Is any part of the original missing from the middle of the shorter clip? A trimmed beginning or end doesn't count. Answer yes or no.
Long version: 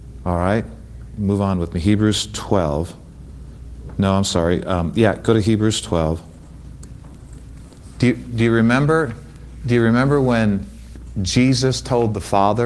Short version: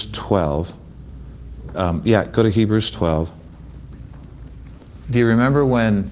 yes